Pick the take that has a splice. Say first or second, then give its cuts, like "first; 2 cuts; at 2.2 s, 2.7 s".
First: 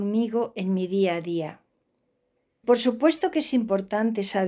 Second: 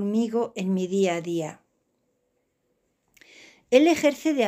first; 1 cut; at 2.6 s